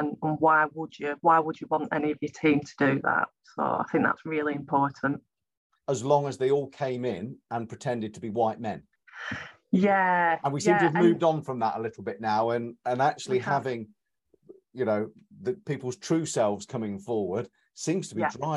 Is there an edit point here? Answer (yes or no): yes